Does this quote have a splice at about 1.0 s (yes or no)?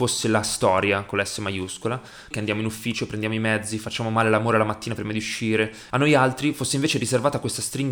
no